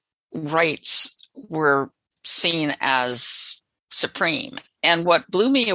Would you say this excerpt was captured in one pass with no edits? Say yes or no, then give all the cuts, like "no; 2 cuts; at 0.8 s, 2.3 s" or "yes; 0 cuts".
yes; 0 cuts